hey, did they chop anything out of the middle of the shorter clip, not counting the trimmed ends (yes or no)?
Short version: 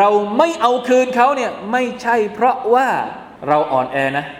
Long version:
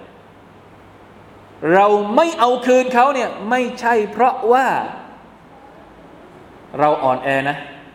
yes